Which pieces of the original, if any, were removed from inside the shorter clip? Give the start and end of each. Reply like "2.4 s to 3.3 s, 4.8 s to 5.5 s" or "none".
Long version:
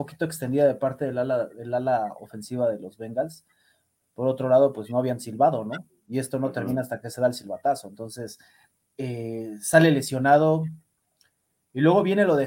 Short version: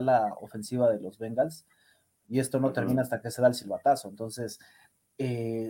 4.0 s to 6.0 s